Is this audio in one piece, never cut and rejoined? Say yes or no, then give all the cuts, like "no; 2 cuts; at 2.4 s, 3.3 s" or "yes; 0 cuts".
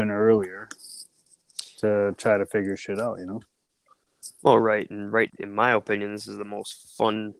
no; 1 cut; at 5.3 s